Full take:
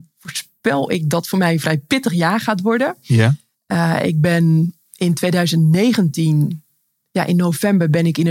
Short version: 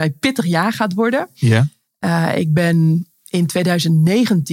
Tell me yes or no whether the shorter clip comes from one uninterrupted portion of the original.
yes